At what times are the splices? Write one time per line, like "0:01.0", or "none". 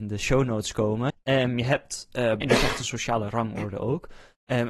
0:01.1
0:02.4